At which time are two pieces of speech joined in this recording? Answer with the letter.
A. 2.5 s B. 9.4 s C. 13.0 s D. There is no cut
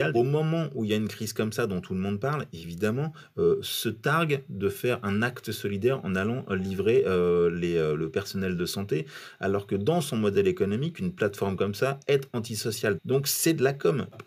C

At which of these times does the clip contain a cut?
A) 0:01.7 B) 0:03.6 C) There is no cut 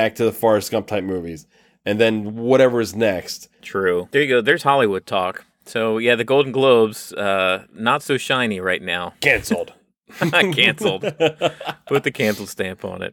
B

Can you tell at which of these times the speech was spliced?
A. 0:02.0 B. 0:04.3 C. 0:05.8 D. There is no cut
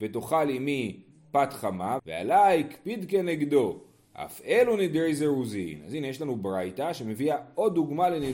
A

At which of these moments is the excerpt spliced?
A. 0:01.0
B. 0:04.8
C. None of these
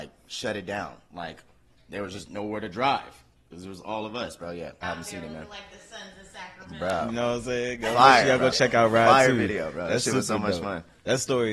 B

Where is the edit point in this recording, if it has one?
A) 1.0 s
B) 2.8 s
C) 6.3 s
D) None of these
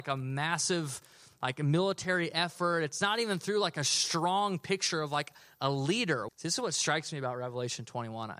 C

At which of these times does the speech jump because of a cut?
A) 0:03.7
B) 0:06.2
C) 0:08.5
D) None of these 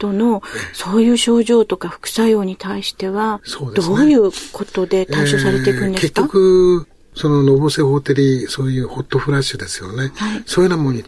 D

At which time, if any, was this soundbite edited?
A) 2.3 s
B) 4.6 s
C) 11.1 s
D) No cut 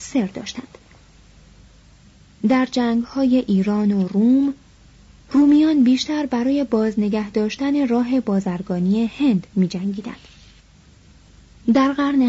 D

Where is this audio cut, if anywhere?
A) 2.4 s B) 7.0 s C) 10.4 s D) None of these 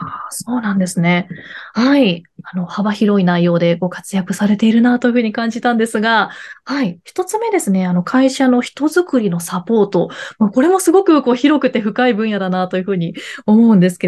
D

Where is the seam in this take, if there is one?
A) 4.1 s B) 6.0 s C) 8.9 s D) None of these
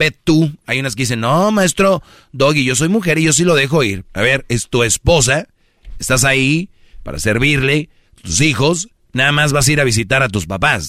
A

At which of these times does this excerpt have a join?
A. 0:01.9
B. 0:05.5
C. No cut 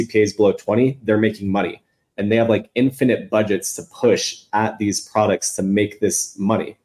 C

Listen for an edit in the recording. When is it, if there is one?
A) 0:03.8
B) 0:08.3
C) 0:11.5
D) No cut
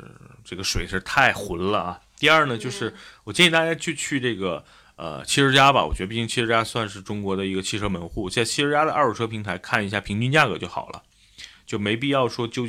D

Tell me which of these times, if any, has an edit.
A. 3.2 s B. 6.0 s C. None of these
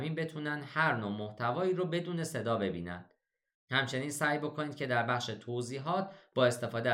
C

